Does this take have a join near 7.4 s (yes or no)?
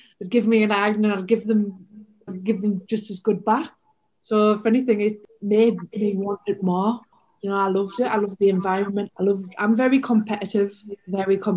no